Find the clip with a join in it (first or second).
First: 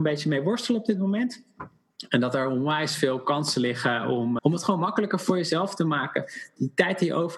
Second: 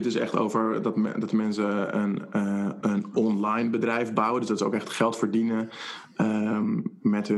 first